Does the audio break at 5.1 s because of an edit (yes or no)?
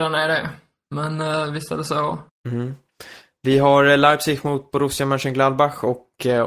no